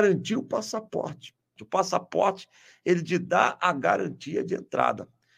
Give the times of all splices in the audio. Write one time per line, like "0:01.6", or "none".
0:01.6